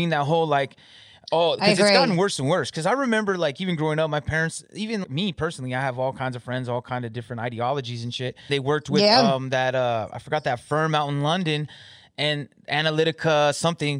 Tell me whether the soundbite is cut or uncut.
cut